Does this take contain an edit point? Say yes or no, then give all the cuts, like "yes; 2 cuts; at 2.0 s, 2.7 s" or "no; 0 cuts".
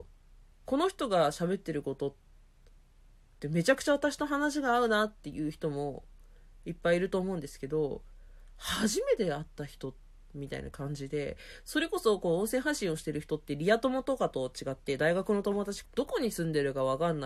yes; 1 cut; at 15.8 s